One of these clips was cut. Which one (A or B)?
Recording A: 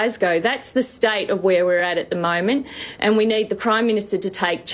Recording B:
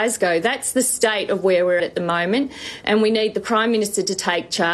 B